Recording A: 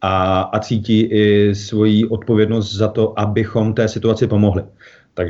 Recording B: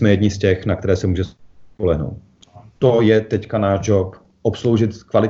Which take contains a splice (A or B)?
B